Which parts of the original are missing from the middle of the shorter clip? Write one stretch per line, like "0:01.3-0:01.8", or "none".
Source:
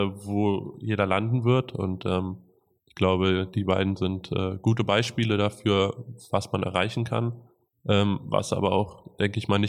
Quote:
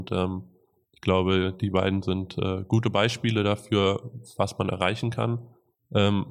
none